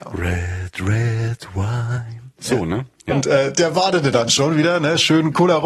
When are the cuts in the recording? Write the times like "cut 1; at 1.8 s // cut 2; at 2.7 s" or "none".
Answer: cut 1; at 3.1 s